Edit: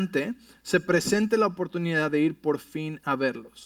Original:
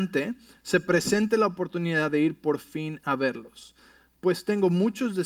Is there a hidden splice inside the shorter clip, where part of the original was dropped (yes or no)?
no